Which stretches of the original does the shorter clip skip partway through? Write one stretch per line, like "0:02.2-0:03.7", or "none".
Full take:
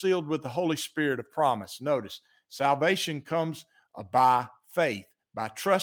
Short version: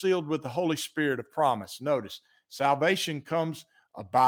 none